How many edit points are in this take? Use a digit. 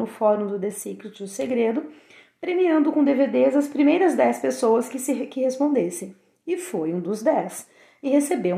0